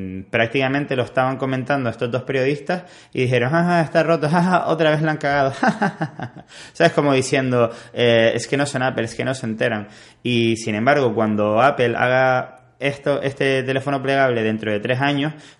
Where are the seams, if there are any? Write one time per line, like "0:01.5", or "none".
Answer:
none